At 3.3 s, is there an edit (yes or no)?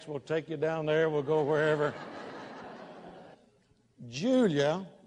yes